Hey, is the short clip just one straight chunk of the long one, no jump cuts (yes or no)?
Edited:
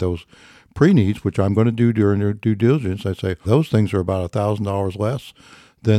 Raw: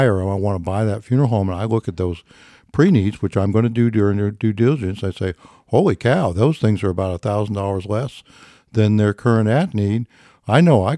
no